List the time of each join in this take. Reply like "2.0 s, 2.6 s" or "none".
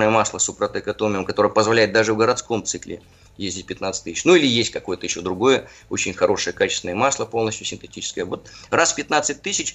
none